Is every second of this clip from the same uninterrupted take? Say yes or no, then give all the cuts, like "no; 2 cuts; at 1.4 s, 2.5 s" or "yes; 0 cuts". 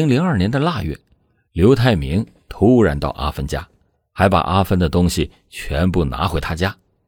yes; 0 cuts